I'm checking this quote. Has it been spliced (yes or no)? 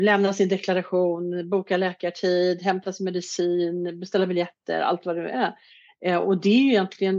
no